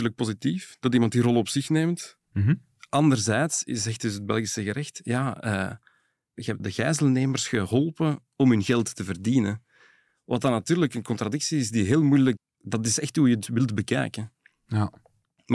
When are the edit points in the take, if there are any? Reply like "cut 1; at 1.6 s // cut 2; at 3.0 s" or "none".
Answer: cut 1; at 6.6 s // cut 2; at 12.4 s